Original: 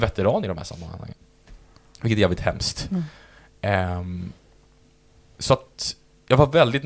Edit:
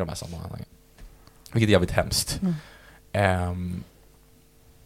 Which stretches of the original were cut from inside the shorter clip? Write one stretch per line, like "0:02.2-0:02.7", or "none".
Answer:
none